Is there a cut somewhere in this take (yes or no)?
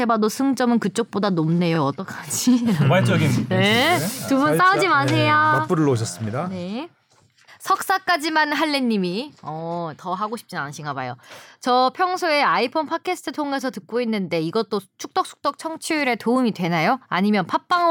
no